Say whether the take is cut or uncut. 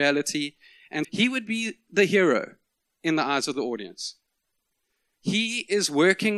cut